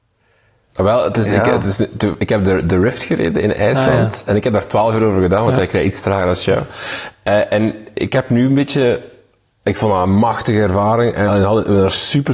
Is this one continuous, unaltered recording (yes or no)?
yes